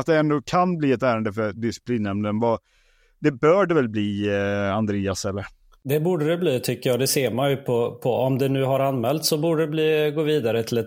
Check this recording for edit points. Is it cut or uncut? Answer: uncut